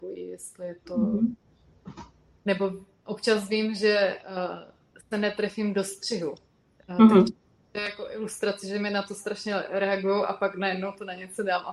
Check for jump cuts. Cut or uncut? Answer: uncut